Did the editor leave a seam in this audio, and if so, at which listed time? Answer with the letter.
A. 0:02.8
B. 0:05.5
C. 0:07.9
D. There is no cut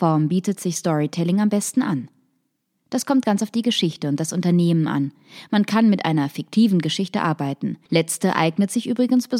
C